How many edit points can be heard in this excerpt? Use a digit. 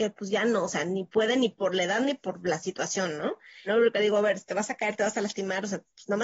1